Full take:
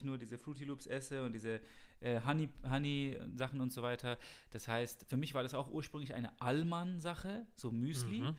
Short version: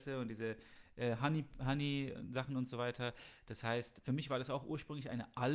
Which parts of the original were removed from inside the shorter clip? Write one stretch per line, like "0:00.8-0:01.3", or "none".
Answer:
none